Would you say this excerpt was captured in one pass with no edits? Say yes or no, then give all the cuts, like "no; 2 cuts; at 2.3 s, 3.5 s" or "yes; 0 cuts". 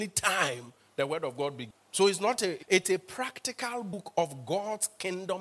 no; 1 cut; at 2.6 s